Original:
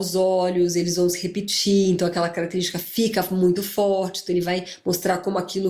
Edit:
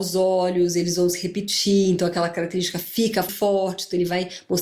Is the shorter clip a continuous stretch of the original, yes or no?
no